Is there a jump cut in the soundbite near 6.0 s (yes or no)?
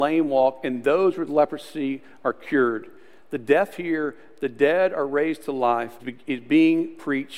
yes